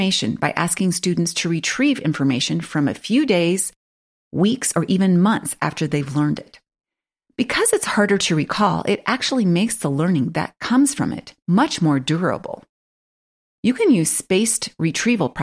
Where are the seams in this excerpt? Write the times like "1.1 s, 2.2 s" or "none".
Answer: none